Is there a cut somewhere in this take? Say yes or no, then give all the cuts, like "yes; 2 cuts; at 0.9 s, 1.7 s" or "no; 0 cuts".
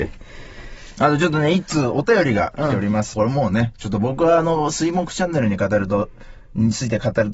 yes; 1 cut; at 3.1 s